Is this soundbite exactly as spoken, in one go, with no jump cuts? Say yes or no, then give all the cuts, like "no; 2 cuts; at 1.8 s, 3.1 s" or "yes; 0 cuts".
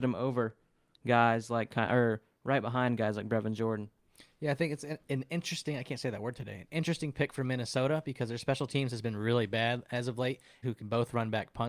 no; 2 cuts; at 5.0 s, 10.6 s